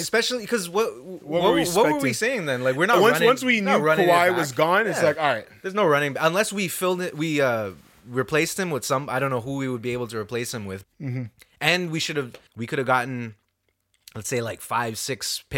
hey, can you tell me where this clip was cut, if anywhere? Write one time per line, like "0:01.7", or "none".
0:10.8
0:12.5